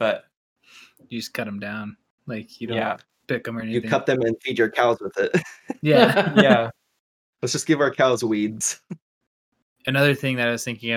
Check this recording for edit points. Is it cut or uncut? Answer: uncut